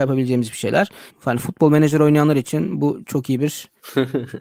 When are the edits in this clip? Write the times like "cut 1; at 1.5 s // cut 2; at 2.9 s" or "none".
cut 1; at 1.1 s